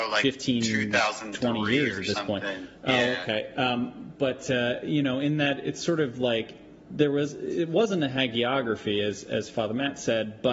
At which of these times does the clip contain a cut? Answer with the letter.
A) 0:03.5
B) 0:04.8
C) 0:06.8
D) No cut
C